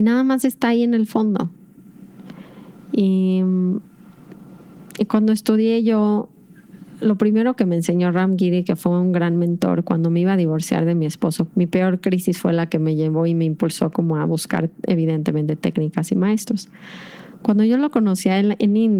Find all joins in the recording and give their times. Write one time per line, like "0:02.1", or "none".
0:11.5